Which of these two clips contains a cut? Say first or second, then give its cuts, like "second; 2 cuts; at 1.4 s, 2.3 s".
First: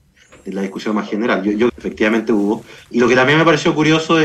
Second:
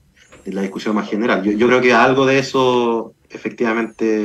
first; 1 cut; at 1.7 s